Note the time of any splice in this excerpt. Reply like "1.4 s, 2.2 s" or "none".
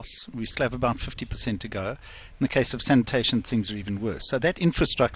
none